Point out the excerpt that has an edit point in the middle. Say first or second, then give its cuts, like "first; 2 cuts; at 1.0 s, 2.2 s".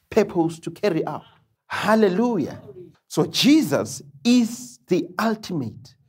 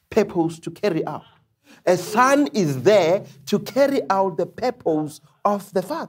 first; 2 cuts; at 1.6 s, 2.9 s